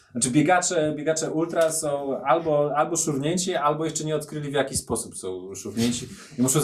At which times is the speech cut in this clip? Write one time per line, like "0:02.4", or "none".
none